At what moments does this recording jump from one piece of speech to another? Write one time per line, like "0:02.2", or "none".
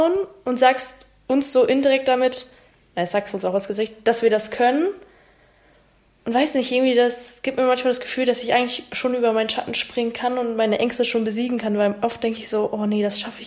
none